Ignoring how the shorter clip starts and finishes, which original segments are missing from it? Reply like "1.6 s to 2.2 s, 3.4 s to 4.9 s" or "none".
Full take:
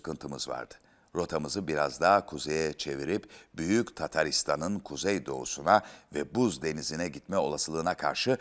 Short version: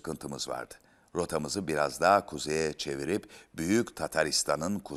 none